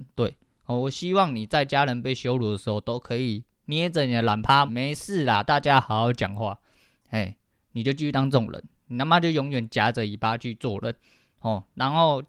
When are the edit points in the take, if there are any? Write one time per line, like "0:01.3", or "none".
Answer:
0:04.7